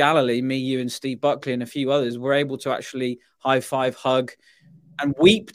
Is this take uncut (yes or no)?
yes